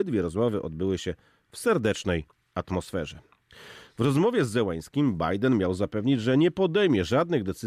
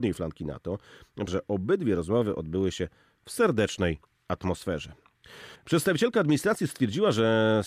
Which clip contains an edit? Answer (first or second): second